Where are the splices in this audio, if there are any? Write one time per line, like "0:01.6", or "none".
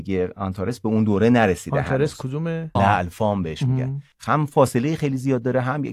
0:02.8
0:04.1